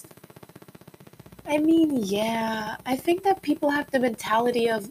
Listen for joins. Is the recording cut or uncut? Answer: uncut